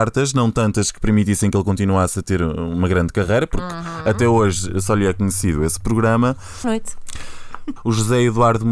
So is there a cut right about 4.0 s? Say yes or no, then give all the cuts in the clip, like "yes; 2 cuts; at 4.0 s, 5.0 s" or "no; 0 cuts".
no; 2 cuts; at 6.6 s, 7.8 s